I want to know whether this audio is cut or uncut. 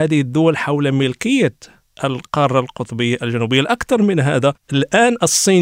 cut